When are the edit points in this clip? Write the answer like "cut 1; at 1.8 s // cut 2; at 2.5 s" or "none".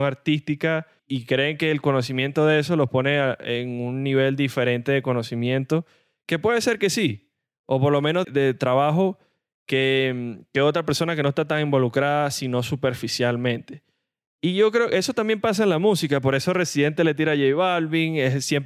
cut 1; at 8.2 s